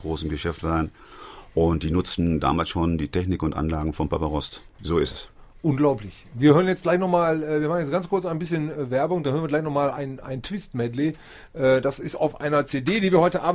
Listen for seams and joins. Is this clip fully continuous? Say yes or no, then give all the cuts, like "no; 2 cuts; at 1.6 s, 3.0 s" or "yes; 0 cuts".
no; 1 cut; at 4.8 s